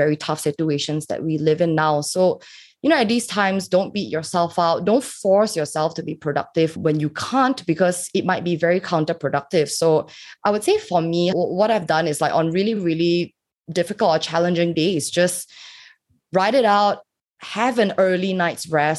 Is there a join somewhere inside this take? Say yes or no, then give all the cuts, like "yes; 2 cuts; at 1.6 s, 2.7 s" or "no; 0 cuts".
no; 0 cuts